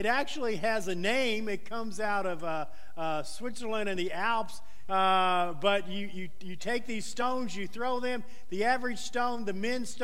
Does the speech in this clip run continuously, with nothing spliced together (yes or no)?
no